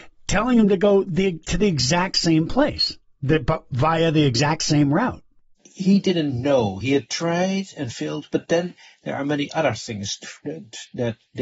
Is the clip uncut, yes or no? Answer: yes